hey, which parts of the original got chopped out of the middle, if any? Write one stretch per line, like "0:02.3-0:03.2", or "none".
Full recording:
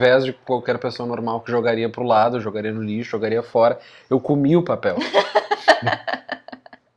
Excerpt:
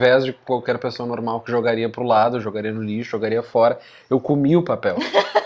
none